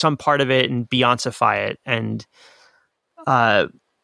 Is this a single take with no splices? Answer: yes; 0 cuts

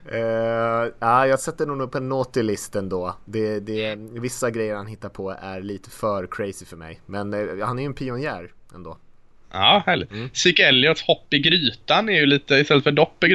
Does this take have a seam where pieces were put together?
no; 0 cuts

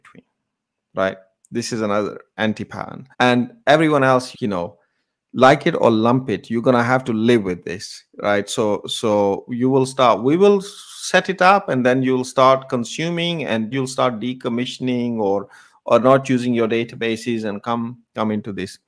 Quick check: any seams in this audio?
yes; 3 cuts; at 3.1 s, 4.3 s, 13.7 s

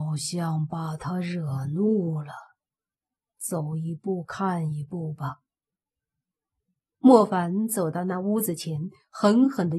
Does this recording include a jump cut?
no; 0 cuts

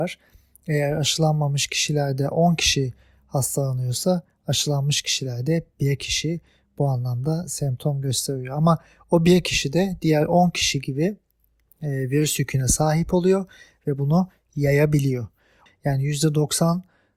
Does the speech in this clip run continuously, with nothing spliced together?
no; 1 cut; at 15.7 s

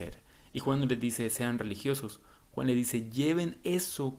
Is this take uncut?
yes; 0 cuts

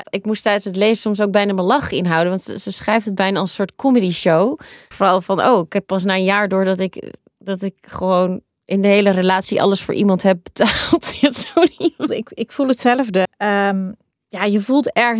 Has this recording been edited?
yes; 3 cuts; at 4.9 s, 12.1 s, 13.2 s

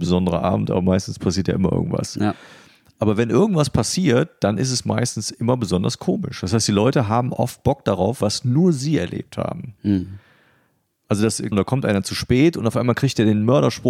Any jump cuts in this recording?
yes; 2 cuts; at 8.2 s, 11.5 s

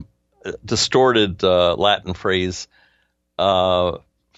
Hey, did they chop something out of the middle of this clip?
no; 0 cuts

